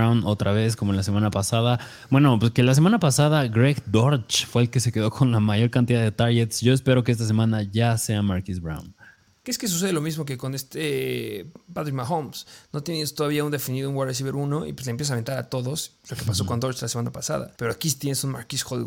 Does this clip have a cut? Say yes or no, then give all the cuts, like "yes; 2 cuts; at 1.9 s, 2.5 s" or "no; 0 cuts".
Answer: yes; 1 cut; at 17.6 s